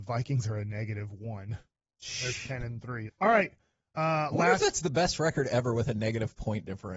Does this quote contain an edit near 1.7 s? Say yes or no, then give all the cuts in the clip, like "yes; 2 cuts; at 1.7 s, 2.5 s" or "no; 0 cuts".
no; 1 cut; at 3.1 s